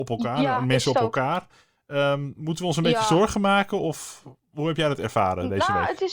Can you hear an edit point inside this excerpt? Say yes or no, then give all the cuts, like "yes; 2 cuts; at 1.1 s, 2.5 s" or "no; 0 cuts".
no; 0 cuts